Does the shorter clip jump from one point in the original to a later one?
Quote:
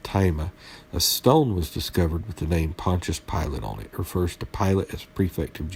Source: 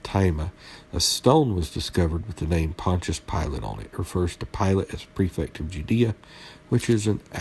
no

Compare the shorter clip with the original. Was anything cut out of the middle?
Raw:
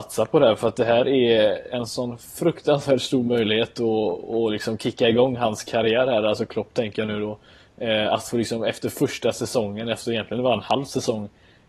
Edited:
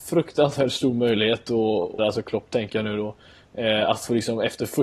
yes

